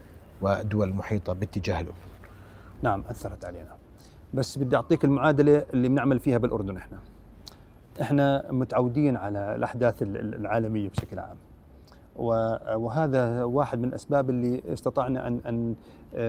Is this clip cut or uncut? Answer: cut